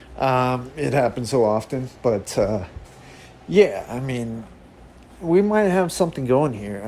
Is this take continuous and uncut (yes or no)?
yes